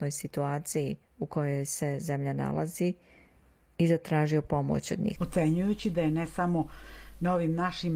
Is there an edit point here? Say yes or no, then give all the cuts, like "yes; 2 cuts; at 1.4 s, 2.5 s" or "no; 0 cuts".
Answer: yes; 1 cut; at 5.2 s